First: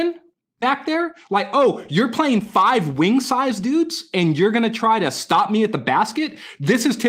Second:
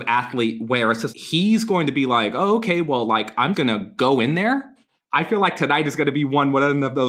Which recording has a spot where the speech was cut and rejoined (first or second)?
second